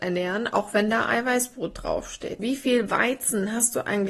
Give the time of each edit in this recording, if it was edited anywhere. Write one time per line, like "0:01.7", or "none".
0:02.4